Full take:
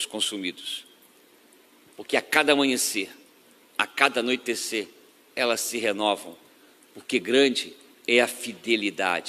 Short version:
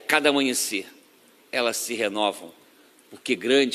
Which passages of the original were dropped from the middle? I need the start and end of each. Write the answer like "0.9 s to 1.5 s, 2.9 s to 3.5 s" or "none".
3.6 s to 5.2 s